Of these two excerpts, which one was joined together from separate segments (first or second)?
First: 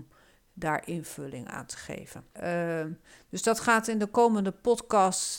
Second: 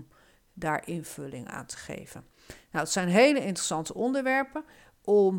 first